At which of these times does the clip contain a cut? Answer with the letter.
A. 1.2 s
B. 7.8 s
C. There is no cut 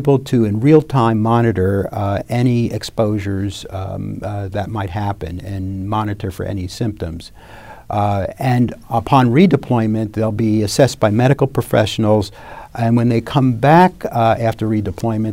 C